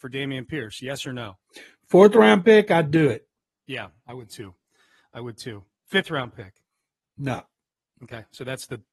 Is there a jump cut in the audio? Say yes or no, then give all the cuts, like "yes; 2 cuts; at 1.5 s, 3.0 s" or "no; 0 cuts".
no; 0 cuts